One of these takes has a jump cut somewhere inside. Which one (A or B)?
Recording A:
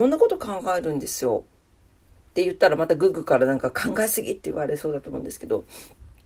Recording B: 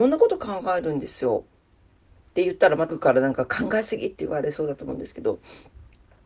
B